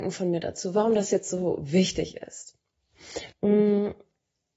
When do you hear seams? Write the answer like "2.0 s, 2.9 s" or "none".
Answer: 3.3 s